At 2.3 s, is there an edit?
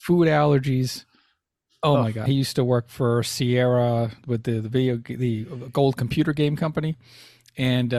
yes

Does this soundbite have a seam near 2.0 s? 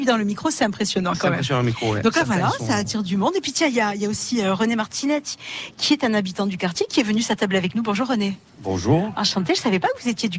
no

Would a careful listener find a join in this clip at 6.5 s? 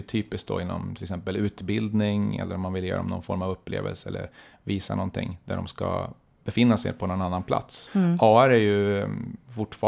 no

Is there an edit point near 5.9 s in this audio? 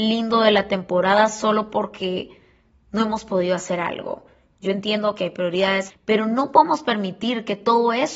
yes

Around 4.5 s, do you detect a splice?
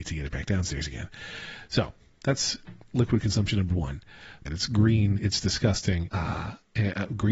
yes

